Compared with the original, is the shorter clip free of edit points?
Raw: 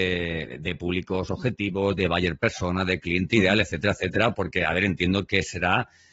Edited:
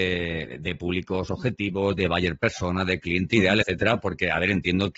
no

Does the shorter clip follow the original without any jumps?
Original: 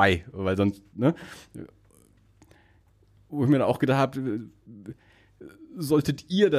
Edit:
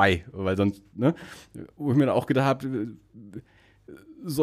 no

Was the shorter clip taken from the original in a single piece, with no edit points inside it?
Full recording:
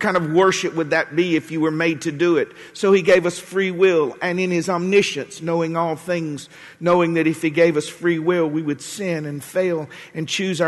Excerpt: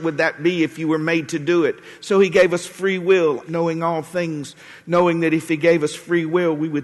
no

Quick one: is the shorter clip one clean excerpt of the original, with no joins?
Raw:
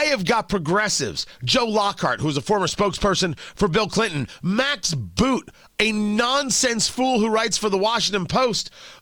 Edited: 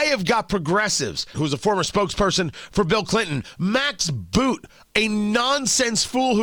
no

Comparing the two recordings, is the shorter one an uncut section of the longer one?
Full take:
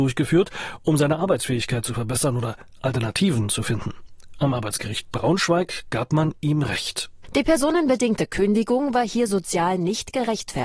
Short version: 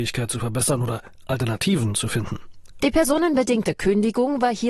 no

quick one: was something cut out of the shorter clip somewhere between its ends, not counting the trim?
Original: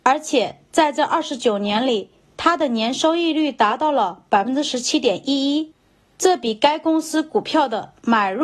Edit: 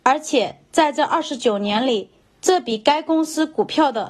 yes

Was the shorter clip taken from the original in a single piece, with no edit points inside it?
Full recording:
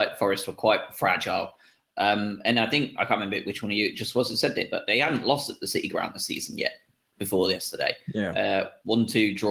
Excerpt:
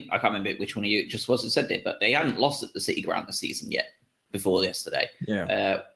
yes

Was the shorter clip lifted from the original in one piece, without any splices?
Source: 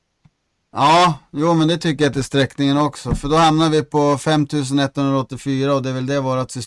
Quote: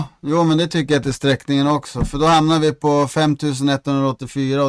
yes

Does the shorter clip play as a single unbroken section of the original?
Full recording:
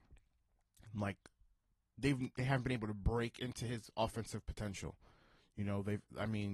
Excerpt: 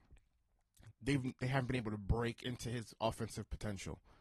no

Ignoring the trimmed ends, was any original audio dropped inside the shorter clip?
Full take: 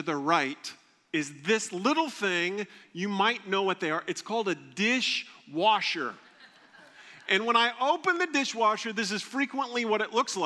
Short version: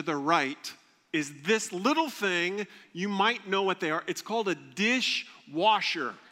no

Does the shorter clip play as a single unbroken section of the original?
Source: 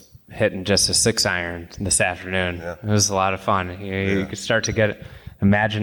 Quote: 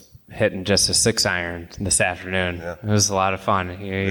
yes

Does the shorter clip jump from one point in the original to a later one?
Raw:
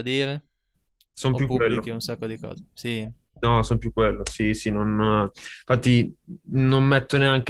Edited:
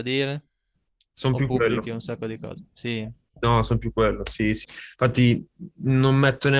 yes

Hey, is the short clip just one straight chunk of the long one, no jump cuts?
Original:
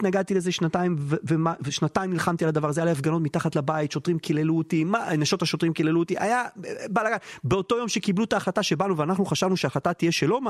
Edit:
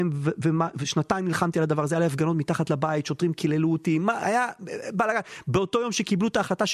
no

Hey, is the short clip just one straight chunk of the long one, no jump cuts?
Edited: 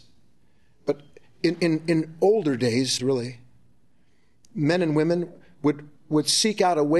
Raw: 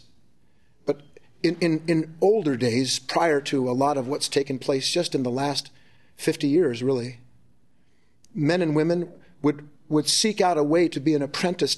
no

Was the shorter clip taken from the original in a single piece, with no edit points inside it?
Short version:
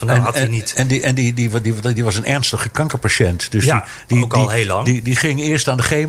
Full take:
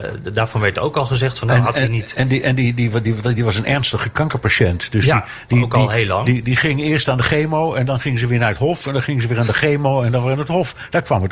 yes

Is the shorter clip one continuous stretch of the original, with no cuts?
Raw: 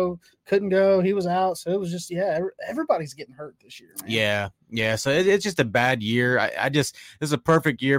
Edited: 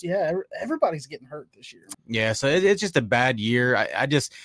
no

